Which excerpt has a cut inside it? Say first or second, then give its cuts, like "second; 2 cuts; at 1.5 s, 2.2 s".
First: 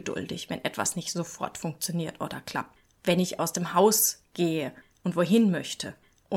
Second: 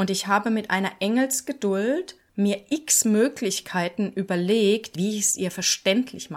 second; 1 cut; at 4.9 s